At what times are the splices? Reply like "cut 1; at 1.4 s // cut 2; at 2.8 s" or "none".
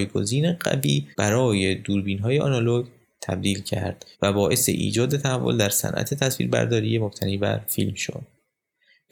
cut 1; at 1.1 s // cut 2; at 4.1 s